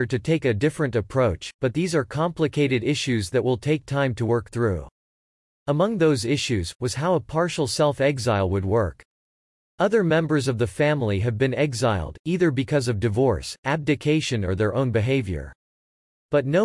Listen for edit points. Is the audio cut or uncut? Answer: cut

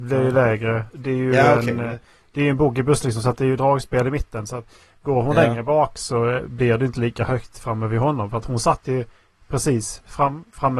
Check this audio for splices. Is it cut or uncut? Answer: cut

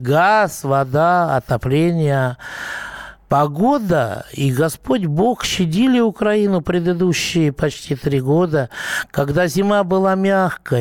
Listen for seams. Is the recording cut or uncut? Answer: uncut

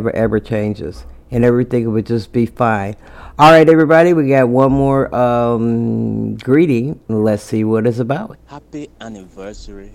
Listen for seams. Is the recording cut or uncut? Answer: cut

